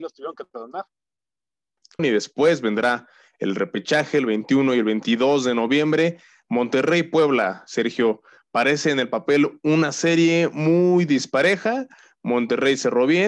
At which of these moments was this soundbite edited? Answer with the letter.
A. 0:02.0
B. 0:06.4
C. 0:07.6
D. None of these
A